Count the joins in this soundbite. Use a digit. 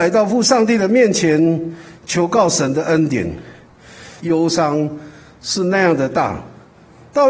1